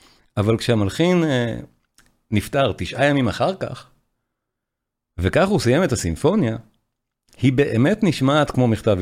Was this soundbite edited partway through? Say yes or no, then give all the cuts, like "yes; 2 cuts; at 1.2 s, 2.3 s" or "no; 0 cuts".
no; 0 cuts